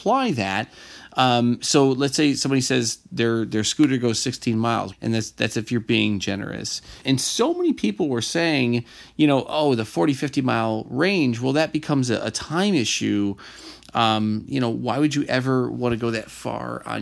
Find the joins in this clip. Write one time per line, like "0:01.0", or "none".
0:04.9
0:07.0